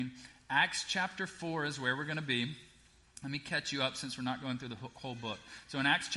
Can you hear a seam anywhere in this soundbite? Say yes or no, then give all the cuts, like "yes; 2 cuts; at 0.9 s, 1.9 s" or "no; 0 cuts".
no; 0 cuts